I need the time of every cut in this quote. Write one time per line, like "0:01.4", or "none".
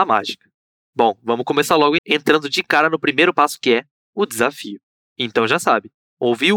0:02.0
0:05.0